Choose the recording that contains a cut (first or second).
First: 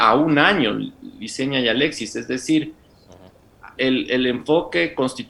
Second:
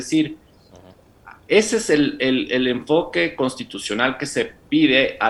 first